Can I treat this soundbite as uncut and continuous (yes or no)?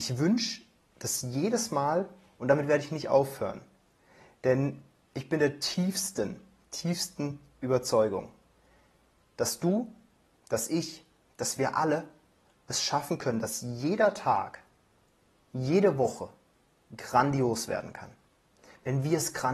yes